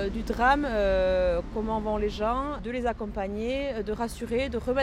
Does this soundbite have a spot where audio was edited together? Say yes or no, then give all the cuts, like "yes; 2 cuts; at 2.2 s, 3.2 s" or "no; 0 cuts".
no; 0 cuts